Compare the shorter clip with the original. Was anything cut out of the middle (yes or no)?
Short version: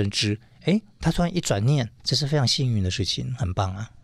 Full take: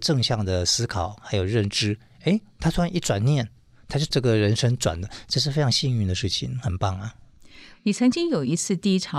yes